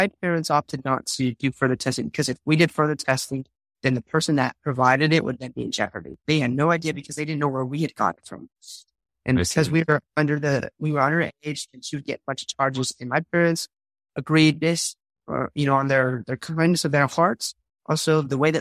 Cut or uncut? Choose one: cut